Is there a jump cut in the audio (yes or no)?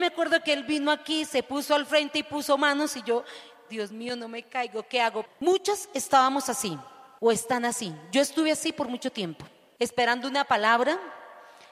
yes